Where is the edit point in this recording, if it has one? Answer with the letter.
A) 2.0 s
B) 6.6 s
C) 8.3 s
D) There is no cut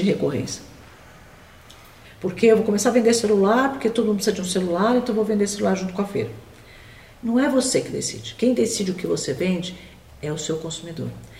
A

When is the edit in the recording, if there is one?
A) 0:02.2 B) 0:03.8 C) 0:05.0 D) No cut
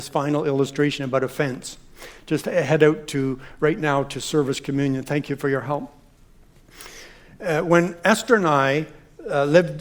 D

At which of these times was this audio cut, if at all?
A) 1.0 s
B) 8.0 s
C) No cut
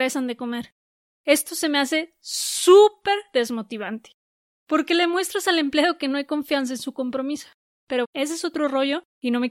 B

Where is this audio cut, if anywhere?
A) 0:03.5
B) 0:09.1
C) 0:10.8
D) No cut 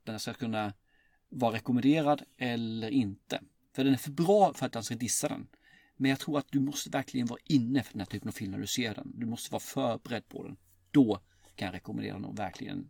D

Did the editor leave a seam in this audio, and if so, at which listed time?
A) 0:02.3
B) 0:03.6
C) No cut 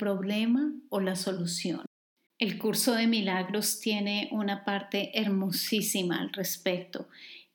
A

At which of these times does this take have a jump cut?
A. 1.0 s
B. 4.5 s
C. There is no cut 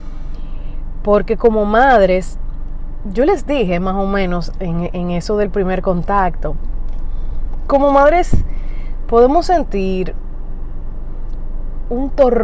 C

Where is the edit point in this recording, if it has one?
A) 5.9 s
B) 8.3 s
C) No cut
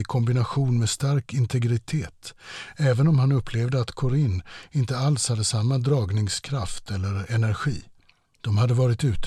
B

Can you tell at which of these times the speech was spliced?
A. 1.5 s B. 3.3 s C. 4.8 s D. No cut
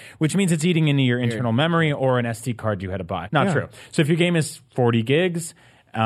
B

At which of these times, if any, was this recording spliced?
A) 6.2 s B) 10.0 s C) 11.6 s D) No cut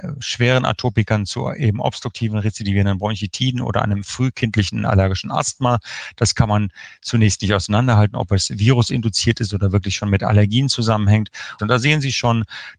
C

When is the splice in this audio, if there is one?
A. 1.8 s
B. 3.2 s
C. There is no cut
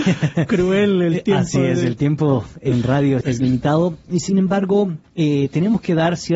B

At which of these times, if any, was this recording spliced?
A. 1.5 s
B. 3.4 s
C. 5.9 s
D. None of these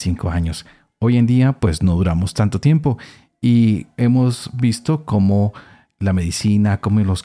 D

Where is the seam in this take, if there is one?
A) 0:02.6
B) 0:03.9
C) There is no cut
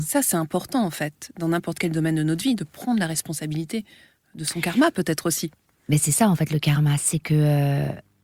C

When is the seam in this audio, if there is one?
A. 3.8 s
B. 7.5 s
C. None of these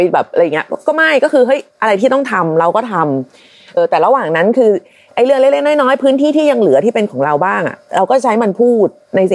A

